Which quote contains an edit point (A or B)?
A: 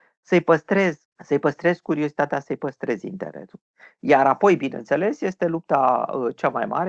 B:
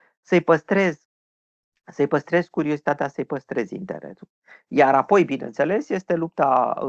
A